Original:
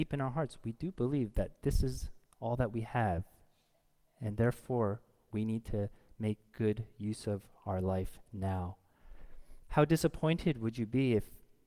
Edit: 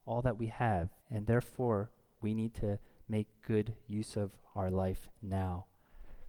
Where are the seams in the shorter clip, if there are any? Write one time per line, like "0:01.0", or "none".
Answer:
0:01.0